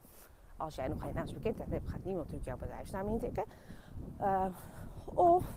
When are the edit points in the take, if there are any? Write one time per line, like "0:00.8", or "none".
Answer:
none